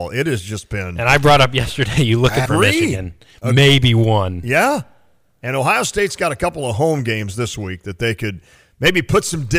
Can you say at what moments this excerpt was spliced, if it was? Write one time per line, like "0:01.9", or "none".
0:02.5